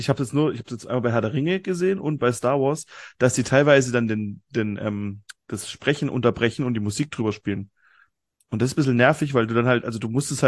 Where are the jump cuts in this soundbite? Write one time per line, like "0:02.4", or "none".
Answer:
none

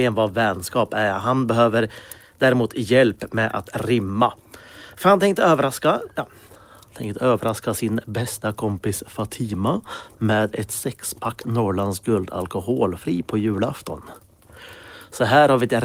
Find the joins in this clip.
none

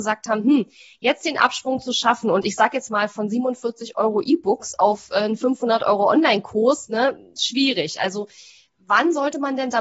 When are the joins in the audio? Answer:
none

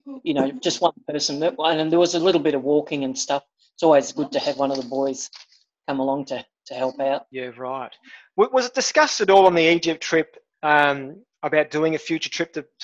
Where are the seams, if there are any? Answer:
0:07.3

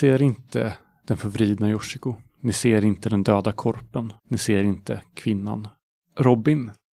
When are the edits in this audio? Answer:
0:04.2

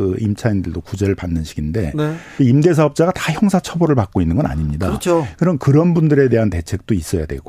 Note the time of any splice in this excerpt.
0:02.4

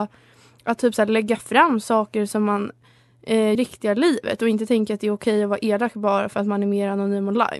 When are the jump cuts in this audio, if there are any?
0:03.6

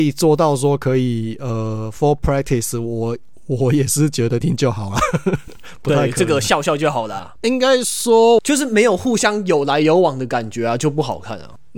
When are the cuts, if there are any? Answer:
0:04.4
0:07.4
0:08.4

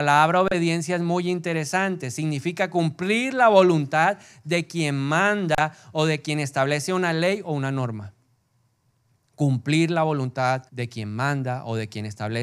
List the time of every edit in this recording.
0:10.7

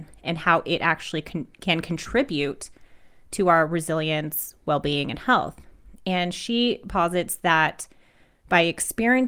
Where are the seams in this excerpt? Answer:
none

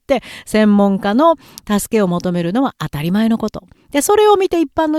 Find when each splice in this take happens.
none

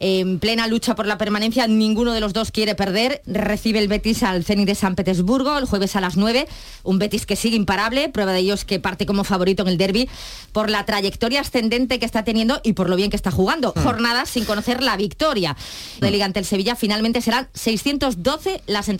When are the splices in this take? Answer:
0:03.2
0:13.8
0:16.0

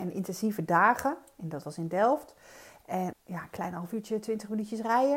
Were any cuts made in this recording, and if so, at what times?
0:03.1

